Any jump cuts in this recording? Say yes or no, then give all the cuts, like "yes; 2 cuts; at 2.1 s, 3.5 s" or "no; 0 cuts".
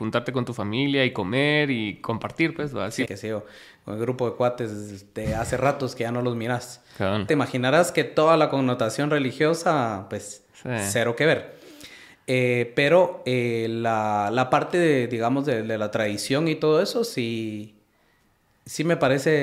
yes; 2 cuts; at 3.1 s, 7.3 s